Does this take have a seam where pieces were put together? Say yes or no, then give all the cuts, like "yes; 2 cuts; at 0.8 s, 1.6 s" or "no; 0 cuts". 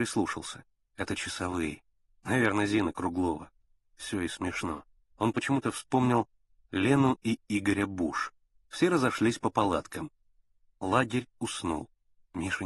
yes; 2 cuts; at 2.1 s, 8.6 s